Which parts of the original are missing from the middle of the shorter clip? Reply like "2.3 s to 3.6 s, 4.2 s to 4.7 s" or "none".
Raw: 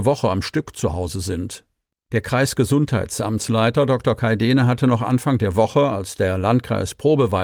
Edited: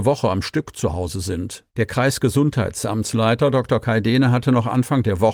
1.7 s to 2.0 s

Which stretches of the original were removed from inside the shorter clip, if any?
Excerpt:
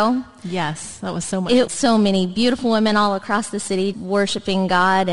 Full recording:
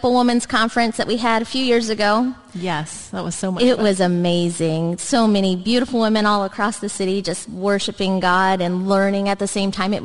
3.8 s to 5.0 s, 7.2 s to 7.5 s

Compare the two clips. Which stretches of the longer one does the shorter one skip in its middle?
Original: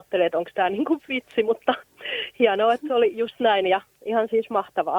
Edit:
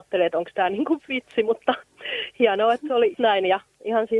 3.1 s to 3.3 s

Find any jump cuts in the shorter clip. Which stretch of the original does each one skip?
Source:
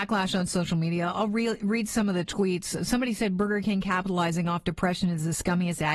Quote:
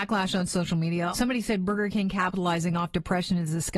1.1 s to 2.9 s

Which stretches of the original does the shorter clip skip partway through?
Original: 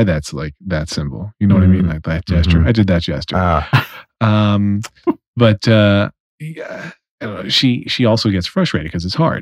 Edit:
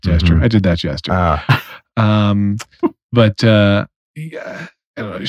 none

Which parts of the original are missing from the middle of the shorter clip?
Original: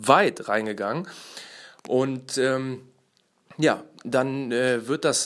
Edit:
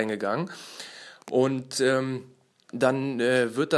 3.3 s to 4.0 s

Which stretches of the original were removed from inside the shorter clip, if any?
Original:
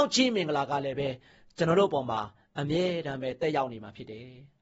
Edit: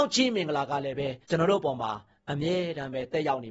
1.2 s to 1.5 s

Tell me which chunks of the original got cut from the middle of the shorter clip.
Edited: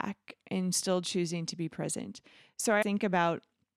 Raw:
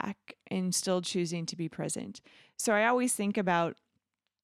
2.8 s to 3.2 s

